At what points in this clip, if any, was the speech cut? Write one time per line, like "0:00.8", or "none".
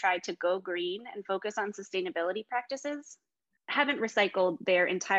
0:03.6